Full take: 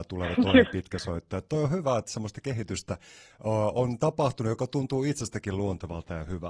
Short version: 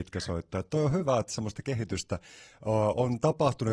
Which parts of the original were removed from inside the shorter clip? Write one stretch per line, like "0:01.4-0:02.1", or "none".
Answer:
none